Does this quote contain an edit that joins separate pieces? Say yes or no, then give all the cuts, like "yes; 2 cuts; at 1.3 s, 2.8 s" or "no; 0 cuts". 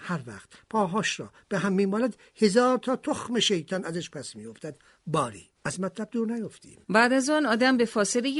yes; 2 cuts; at 5.5 s, 6.8 s